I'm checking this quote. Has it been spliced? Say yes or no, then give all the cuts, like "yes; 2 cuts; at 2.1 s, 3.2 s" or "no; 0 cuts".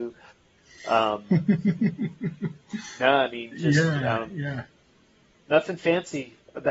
no; 0 cuts